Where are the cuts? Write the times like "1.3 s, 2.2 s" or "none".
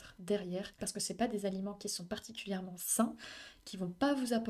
none